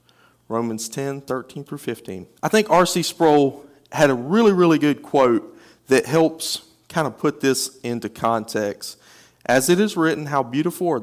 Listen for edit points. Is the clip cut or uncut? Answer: cut